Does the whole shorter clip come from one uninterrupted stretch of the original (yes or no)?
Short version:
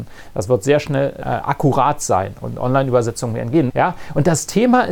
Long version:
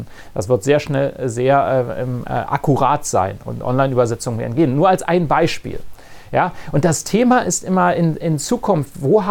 no